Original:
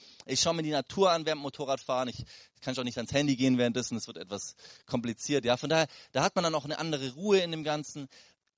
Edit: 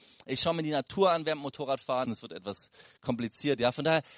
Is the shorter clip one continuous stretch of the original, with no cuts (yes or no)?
no